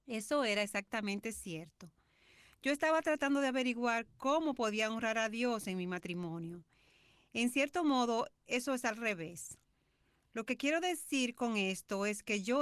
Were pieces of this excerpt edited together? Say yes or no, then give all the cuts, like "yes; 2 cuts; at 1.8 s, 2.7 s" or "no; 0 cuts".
no; 0 cuts